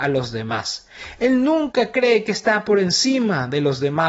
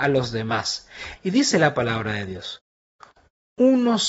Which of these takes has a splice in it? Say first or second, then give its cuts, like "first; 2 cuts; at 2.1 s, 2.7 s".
second; 1 cut; at 1.2 s